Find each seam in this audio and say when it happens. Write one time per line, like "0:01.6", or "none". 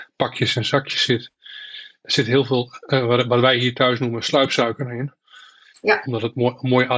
none